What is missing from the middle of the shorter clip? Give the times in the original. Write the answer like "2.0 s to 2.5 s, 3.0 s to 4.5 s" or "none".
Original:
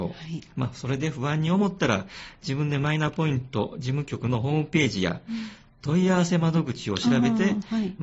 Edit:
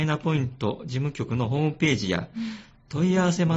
none